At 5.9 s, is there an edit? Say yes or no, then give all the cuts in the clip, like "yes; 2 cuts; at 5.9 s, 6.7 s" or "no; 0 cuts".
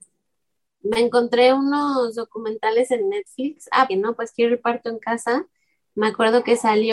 no; 1 cut; at 3.9 s